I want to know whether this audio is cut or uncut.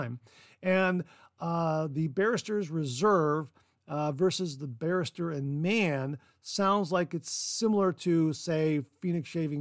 uncut